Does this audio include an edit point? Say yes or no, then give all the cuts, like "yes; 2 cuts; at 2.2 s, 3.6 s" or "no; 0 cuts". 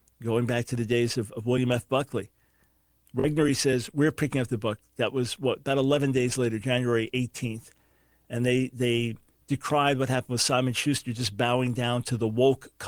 no; 0 cuts